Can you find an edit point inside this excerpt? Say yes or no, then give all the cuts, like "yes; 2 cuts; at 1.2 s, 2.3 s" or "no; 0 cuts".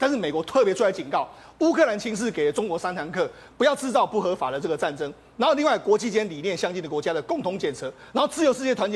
no; 0 cuts